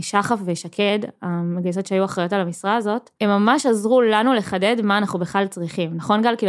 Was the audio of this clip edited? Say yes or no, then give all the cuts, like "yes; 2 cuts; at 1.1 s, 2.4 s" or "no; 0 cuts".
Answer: yes; 1 cut; at 3.1 s